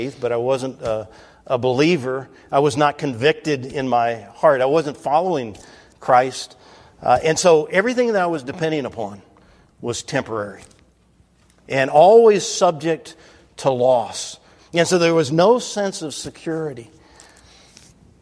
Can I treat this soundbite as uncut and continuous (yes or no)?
yes